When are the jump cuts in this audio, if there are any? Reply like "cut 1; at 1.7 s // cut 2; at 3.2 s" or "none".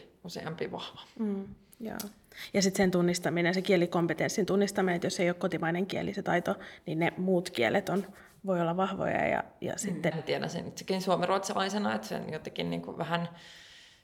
cut 1; at 10.1 s